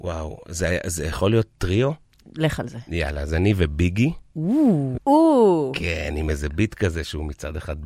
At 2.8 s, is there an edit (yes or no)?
no